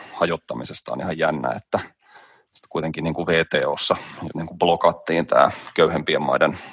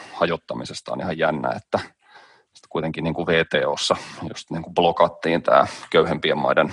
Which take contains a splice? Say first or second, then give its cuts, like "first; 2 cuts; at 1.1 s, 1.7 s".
first; 1 cut; at 4.3 s